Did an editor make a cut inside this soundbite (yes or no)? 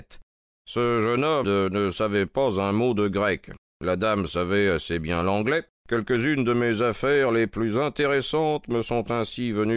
yes